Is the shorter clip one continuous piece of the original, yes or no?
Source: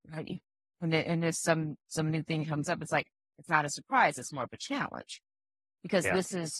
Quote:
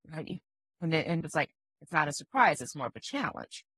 no